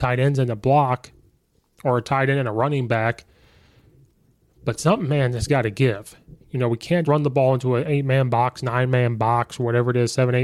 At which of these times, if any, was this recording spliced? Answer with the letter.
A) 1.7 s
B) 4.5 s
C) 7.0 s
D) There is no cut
C